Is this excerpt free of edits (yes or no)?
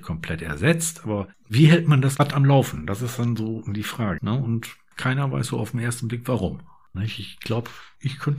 no